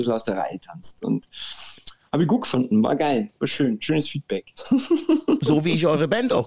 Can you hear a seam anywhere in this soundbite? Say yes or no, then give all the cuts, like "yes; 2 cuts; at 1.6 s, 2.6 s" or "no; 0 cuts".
no; 0 cuts